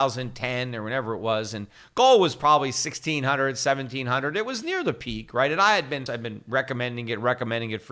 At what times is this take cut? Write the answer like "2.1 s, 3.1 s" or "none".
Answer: 6.1 s